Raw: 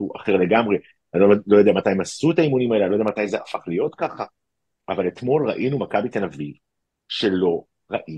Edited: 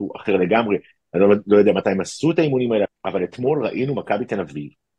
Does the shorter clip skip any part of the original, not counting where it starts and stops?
yes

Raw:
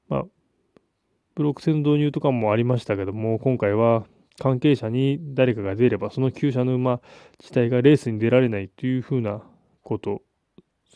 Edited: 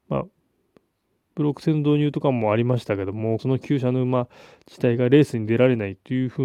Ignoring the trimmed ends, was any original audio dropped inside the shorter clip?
yes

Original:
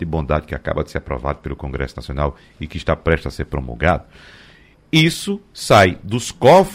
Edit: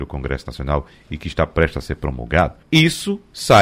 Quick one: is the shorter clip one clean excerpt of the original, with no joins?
no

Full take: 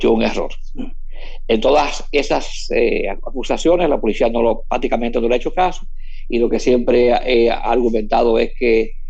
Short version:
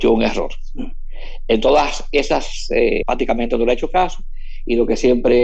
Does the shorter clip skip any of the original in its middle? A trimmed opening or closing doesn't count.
yes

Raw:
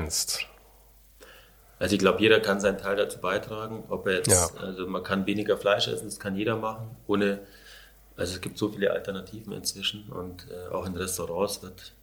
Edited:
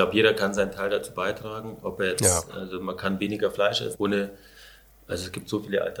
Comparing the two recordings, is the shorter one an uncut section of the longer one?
no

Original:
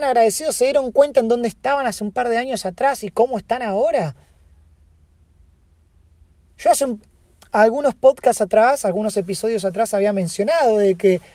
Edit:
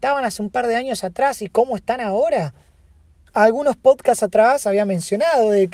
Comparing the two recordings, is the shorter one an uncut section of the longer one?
no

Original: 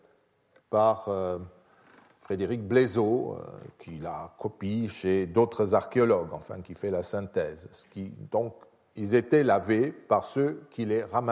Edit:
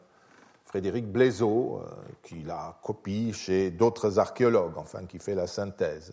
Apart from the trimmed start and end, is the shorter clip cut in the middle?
no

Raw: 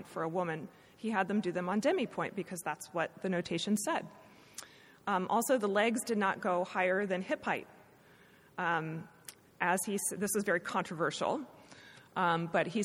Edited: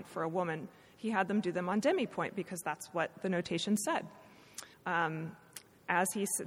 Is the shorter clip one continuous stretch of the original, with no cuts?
no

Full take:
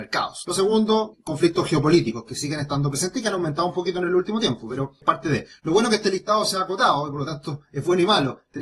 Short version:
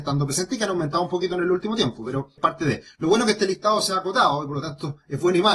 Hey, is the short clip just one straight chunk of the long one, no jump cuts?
yes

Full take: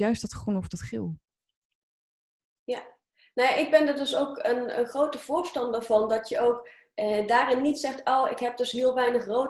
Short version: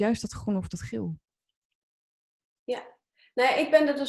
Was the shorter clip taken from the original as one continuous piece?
yes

